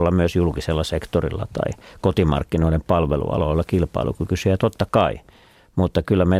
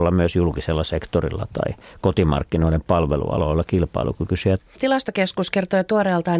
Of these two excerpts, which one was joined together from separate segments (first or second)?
second